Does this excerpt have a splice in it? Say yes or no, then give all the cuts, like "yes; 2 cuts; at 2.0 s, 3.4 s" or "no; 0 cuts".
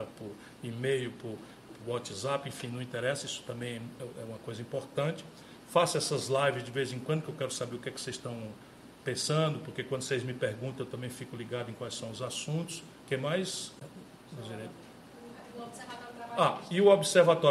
yes; 1 cut; at 1.7 s